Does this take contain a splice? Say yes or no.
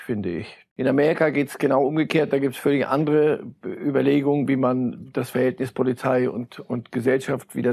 no